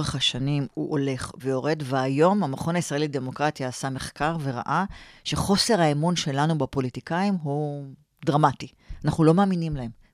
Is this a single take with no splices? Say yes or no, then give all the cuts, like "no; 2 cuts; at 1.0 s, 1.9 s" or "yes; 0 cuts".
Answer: no; 1 cut; at 1.4 s